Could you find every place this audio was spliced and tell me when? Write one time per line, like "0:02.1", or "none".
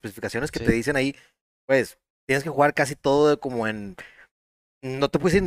0:02.1